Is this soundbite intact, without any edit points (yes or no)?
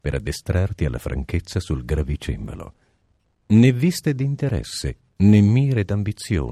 yes